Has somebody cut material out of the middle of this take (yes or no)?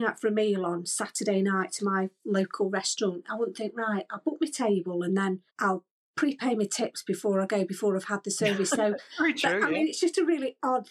yes